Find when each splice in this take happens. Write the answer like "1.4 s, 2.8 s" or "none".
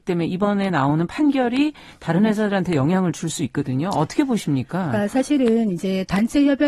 none